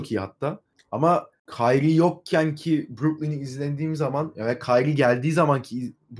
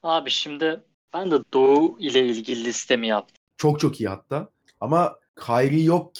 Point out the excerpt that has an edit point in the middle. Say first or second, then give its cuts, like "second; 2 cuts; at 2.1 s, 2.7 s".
second; 2 cuts; at 1.4 s, 3.5 s